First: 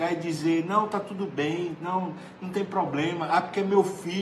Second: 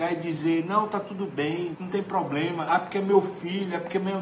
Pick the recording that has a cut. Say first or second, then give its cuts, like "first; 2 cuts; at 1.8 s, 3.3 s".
second; 1 cut; at 1.8 s